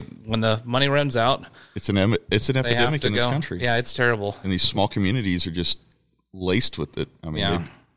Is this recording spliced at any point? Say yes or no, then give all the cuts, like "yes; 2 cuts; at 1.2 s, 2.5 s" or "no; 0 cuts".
no; 0 cuts